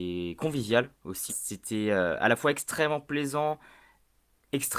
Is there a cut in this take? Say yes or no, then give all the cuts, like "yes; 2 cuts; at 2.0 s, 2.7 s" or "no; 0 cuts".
yes; 1 cut; at 1.3 s